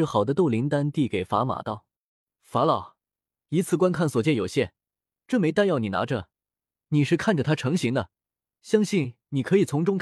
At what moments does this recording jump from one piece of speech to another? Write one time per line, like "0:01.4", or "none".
none